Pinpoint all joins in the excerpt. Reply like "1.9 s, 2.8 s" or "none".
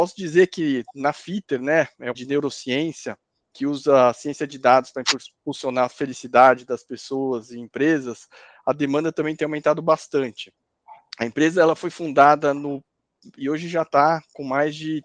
2.1 s, 13.4 s